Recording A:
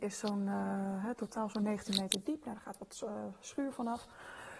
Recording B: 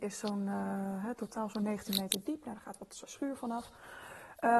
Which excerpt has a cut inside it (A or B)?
B